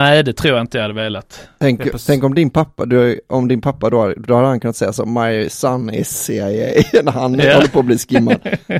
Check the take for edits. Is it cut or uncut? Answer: uncut